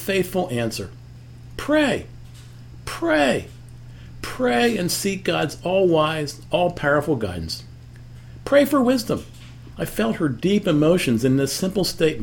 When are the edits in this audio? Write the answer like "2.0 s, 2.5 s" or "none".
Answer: 6.5 s, 9.7 s